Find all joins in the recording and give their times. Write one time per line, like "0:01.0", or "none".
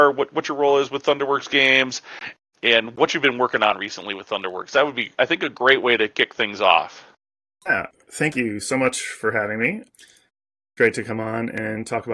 none